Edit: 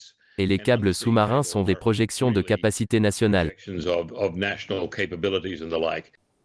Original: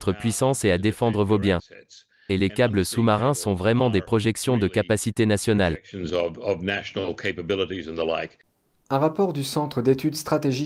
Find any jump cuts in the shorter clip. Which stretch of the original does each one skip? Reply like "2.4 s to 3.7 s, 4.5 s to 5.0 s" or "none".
3.6 s to 3.9 s

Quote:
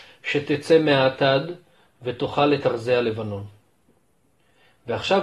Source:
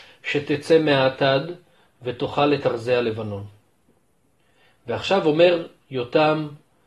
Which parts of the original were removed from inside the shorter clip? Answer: none

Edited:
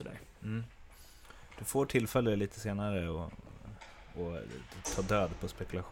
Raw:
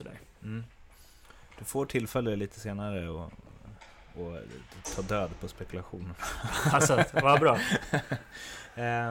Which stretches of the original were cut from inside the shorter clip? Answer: none

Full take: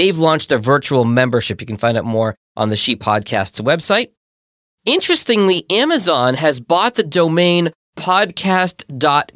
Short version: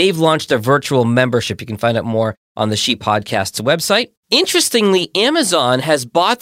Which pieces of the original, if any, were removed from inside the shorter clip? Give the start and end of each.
4.2 s to 4.7 s

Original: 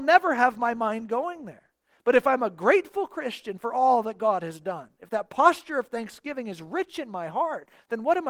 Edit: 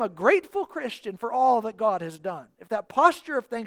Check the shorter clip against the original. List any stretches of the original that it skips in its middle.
none

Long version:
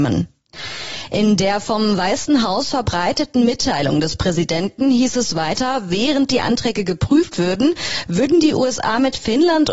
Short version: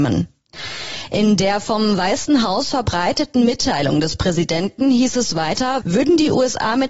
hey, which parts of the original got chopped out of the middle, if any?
5.8 s to 8.0 s

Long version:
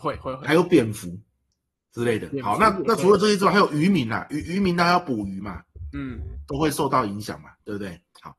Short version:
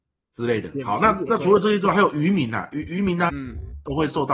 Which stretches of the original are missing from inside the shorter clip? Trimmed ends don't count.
4.9 s to 5.9 s

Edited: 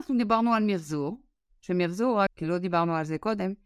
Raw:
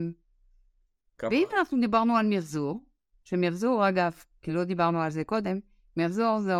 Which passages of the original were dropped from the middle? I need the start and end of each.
3.9 s to 4.3 s

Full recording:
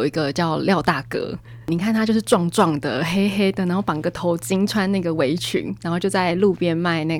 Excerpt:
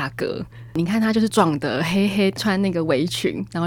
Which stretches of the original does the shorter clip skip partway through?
2.2 s to 2.5 s, 3.6 s to 4.7 s

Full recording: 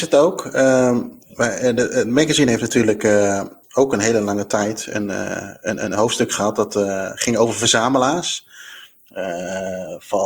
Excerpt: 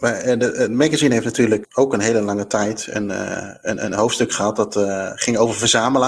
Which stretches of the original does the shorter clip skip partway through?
3.0 s to 3.6 s

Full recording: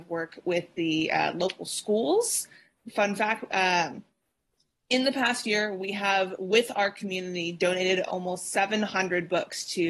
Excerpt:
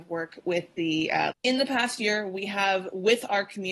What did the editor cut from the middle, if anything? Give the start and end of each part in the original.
1.3 s to 4.8 s

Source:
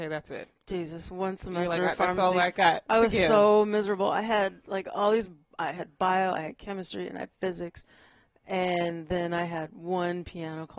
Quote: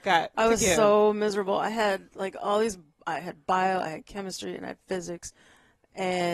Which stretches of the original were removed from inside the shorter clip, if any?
none

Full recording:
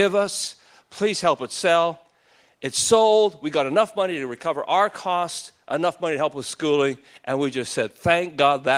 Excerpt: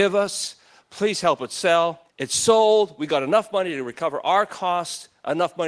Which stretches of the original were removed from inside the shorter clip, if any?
2.1 s to 2.5 s

